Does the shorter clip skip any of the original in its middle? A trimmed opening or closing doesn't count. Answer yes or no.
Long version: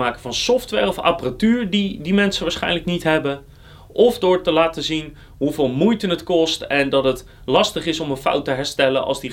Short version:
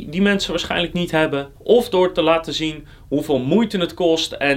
yes